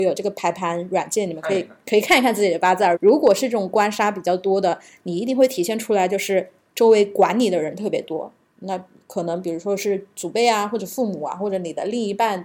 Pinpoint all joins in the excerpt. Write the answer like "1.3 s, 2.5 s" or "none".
2.9 s, 8.6 s